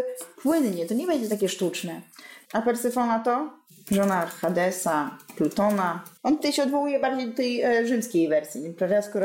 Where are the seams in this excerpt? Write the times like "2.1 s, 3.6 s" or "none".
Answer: 2.4 s